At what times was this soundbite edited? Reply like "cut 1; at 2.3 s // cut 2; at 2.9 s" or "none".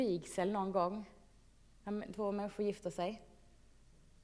none